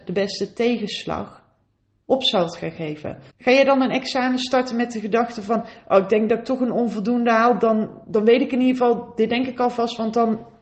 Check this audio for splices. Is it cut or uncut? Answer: cut